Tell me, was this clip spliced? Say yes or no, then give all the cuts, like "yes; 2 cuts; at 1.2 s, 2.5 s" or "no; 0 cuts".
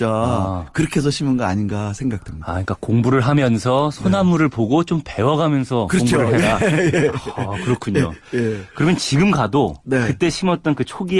no; 0 cuts